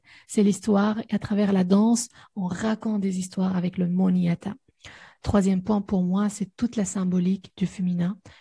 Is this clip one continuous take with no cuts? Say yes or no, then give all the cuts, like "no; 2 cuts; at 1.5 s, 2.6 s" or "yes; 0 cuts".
yes; 0 cuts